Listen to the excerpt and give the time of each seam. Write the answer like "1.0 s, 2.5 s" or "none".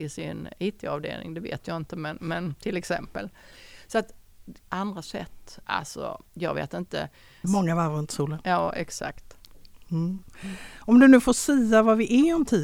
4.6 s, 5.6 s, 7.4 s

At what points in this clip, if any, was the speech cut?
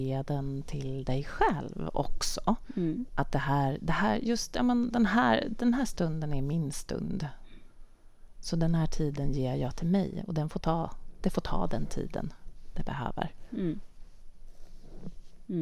3.1 s

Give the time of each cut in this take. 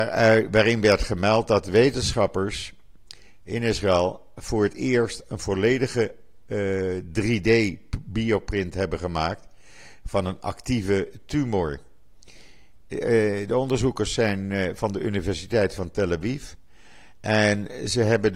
12.8 s

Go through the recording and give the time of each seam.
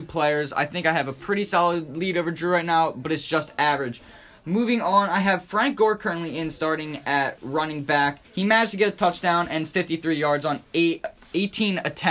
8.2 s

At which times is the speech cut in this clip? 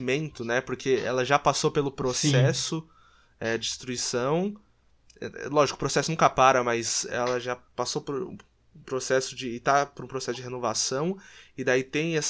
none

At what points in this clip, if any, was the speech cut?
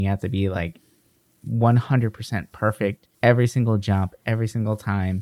3.1 s

